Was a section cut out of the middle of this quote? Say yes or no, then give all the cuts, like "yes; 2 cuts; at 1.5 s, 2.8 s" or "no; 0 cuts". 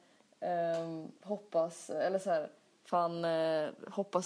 yes; 1 cut; at 1.2 s